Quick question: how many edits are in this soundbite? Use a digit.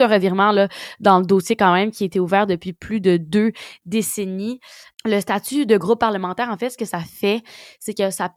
1